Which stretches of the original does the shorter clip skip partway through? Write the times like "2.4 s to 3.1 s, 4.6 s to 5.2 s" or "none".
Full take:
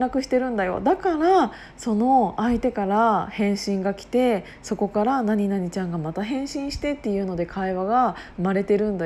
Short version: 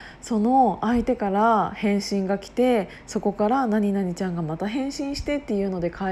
none